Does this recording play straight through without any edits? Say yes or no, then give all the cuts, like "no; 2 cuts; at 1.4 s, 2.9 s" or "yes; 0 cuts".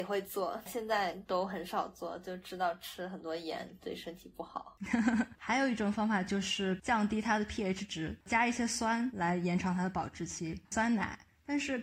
no; 2 cuts; at 5.3 s, 10.6 s